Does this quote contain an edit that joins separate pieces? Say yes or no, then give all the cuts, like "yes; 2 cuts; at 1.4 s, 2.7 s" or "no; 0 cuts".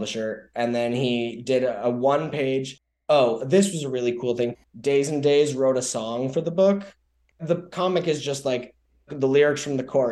no; 0 cuts